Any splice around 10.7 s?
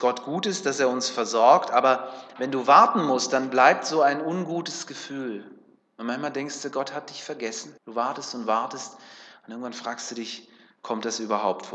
no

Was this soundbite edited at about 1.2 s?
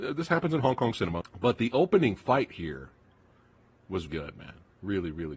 yes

